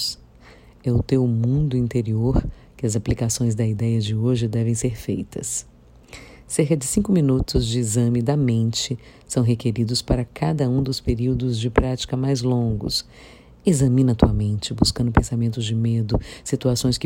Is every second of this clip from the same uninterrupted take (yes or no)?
yes